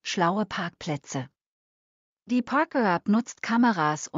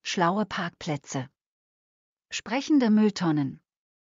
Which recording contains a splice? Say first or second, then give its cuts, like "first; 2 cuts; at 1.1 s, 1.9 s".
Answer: second; 1 cut; at 2.2 s